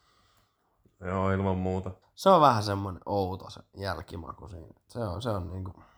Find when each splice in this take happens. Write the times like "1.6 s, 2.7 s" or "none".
2.0 s

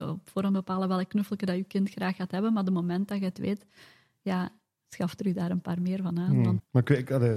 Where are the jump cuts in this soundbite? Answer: none

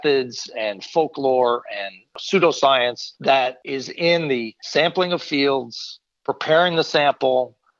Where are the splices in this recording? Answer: none

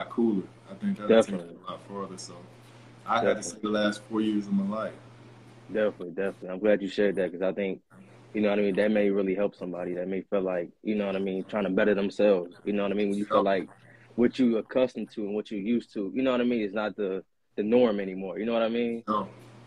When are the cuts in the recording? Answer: none

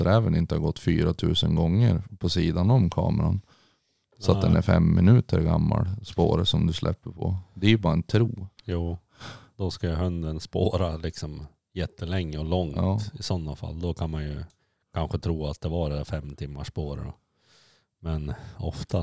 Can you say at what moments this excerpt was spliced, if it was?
8.6 s

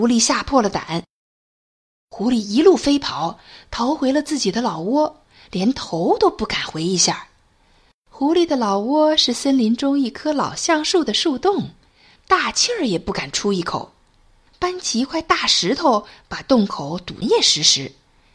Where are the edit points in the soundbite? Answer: 12.2 s, 14.5 s, 17.2 s

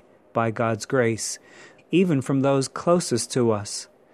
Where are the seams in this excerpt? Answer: 1.8 s

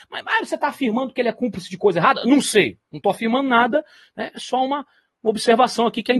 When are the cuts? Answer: none

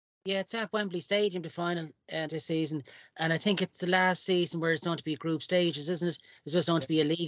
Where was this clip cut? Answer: 2.3 s

